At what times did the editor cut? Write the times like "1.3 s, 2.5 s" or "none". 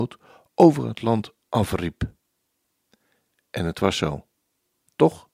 none